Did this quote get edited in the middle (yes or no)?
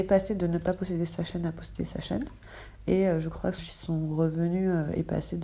yes